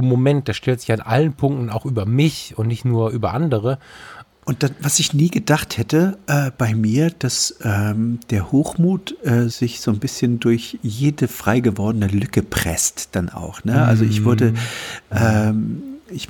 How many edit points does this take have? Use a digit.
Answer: 2